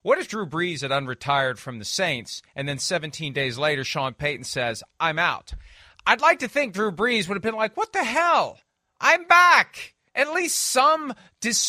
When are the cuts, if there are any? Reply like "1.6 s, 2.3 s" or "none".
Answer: 10.1 s